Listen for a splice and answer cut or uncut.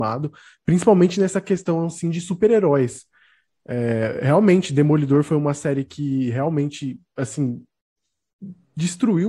uncut